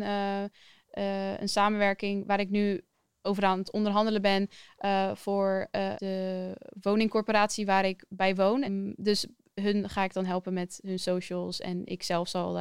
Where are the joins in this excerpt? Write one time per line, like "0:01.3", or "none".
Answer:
0:06.0
0:08.7